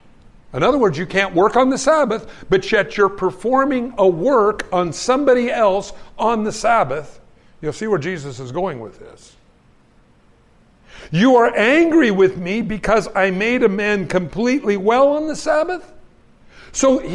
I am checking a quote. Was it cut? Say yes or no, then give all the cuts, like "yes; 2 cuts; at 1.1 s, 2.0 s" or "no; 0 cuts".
no; 0 cuts